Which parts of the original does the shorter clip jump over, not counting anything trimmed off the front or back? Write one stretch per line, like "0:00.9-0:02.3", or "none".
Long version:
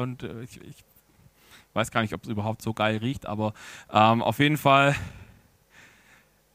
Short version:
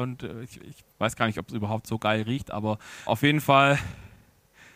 0:00.9-0:01.7
0:03.8-0:04.2